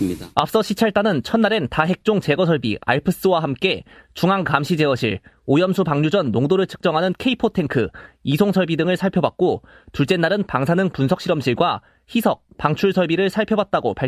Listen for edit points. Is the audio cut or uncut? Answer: uncut